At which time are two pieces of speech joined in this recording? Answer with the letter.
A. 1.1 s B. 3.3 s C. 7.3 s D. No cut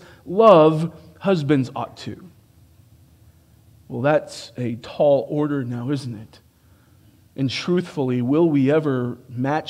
D